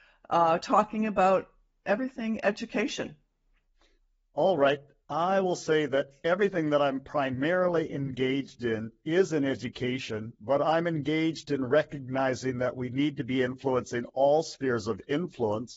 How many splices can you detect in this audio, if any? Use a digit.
0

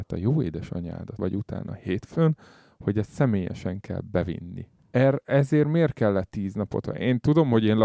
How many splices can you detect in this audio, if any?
1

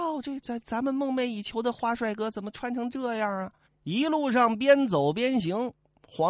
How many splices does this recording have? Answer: 1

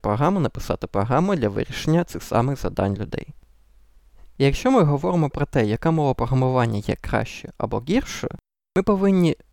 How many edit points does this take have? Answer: 0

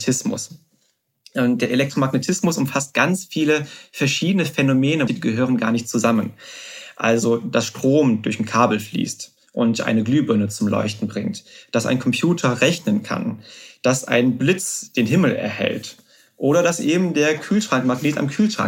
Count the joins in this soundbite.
1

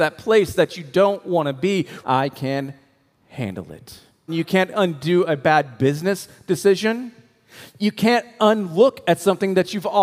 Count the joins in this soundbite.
2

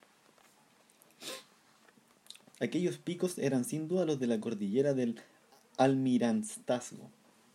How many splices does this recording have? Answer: 1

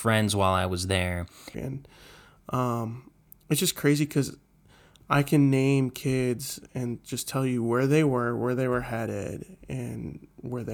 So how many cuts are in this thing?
1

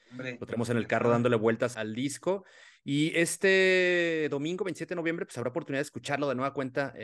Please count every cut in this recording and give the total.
1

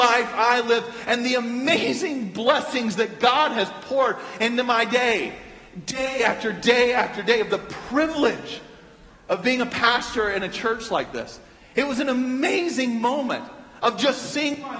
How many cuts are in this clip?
0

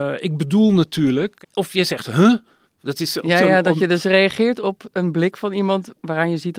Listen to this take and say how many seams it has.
0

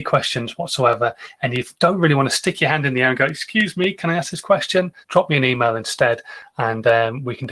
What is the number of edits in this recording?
1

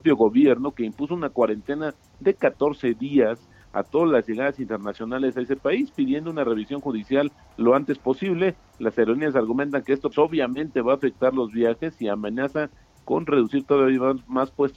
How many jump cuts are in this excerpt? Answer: 1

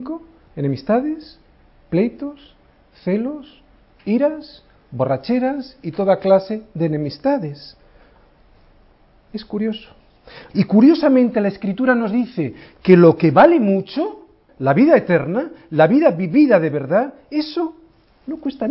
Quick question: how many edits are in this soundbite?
3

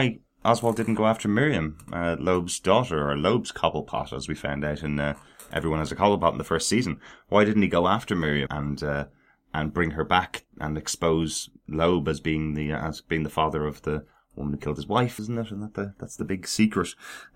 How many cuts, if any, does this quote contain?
2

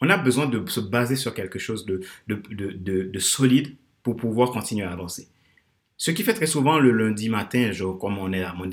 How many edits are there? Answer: 0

